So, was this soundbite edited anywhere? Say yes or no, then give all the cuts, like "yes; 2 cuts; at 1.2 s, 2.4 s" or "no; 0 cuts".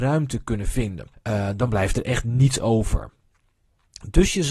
yes; 1 cut; at 1.1 s